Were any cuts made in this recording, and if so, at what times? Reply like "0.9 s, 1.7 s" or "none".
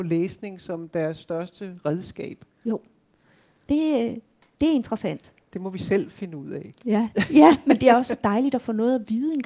3.7 s